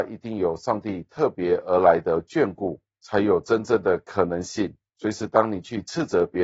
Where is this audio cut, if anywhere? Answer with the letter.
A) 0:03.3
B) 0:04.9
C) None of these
B